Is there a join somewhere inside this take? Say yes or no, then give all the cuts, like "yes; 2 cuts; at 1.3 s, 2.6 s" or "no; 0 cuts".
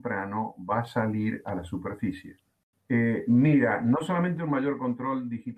yes; 1 cut; at 2.7 s